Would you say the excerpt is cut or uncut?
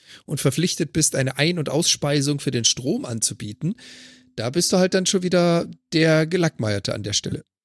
uncut